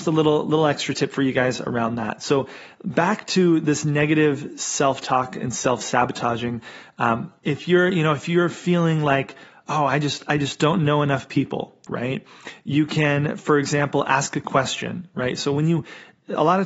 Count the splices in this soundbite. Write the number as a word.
one